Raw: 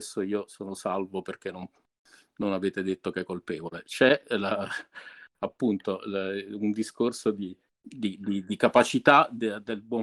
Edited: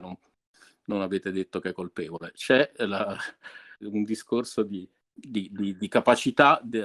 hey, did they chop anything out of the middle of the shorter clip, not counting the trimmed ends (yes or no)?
yes